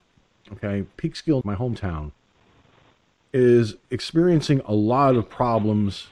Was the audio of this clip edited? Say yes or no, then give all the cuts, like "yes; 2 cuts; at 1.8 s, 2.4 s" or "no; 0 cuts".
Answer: yes; 1 cut; at 1.4 s